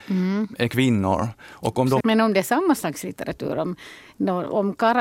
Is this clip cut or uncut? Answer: cut